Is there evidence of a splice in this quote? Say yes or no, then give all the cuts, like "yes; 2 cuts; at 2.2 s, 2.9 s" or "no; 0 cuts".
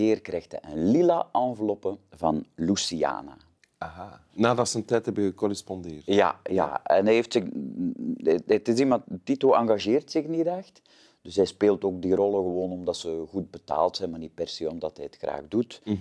yes; 1 cut; at 4.3 s